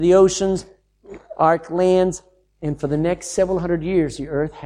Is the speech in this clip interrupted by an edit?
no; 0 cuts

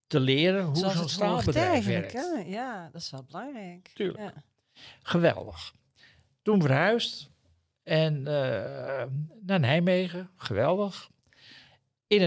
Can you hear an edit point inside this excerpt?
no; 0 cuts

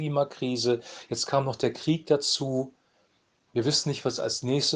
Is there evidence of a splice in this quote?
no; 0 cuts

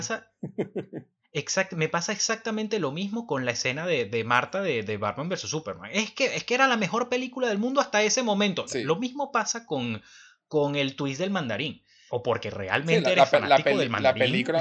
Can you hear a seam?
yes; 2 cuts; at 8.7 s, 12.1 s

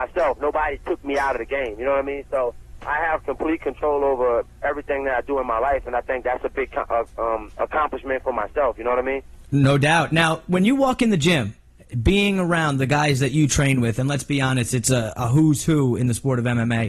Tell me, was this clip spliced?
no; 0 cuts

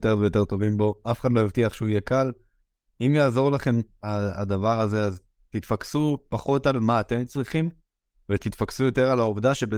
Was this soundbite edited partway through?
no; 0 cuts

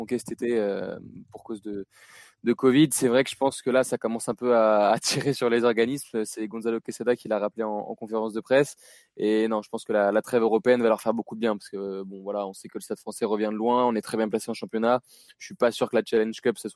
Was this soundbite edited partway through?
no; 0 cuts

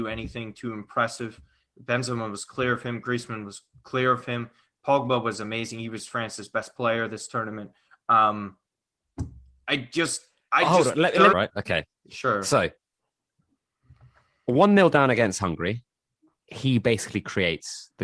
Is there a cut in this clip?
yes; 1 cut; at 11.3 s

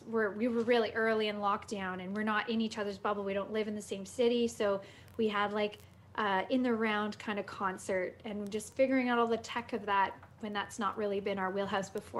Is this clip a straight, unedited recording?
yes; 0 cuts

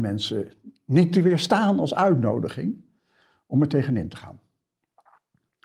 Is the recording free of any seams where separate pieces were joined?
yes; 0 cuts

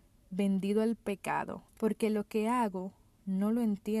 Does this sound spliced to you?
yes; 1 cut; at 1.7 s

